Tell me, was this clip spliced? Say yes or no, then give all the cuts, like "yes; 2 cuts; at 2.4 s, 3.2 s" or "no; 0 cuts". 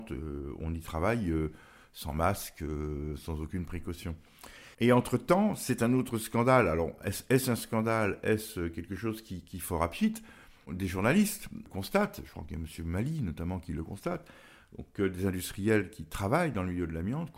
yes; 1 cut; at 4.7 s